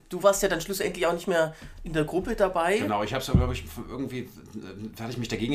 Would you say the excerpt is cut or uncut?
uncut